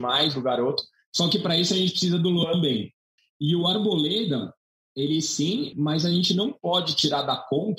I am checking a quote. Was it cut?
yes; 2 cuts; at 3.2 s, 5.7 s

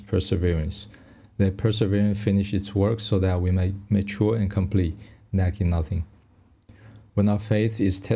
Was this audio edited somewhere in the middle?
no; 0 cuts

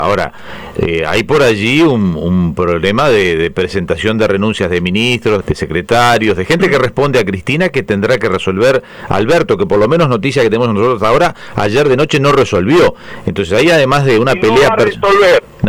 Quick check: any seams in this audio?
yes; 1 cut; at 5.4 s

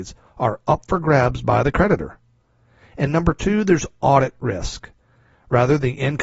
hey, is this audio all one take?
no; 1 cut; at 5.3 s

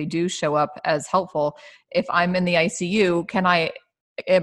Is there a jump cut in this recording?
no; 0 cuts

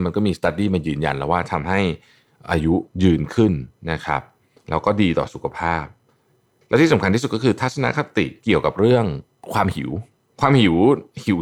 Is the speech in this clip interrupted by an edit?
no; 0 cuts

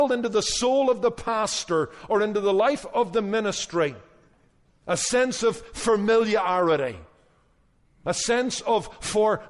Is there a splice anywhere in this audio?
no; 0 cuts

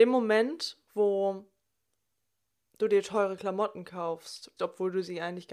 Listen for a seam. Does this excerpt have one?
yes; 1 cut; at 4.6 s

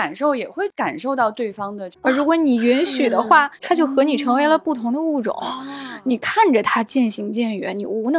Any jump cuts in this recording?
yes; 1 cut; at 1.9 s

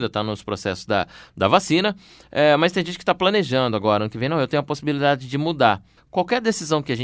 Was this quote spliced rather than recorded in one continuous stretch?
yes; 1 cut; at 6.0 s

